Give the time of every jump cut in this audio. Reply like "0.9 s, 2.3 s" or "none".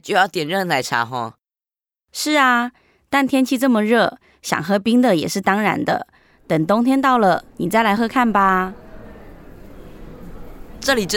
8.0 s